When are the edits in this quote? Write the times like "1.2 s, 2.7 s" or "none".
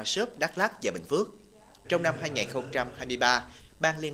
1.8 s